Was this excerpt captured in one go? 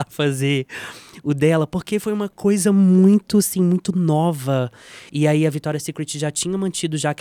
no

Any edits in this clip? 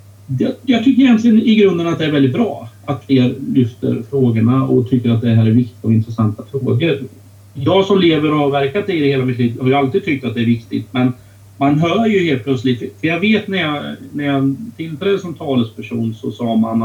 no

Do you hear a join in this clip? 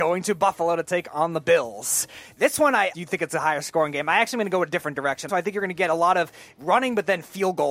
yes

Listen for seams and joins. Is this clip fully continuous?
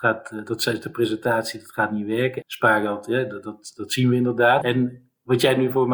no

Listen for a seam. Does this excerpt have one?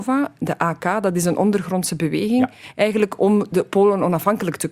no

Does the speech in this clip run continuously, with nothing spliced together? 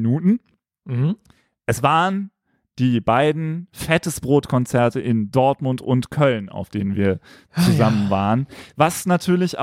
yes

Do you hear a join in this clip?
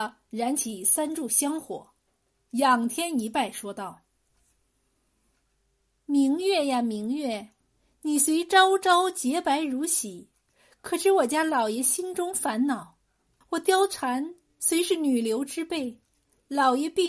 yes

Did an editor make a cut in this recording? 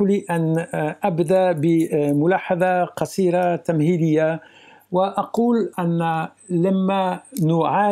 no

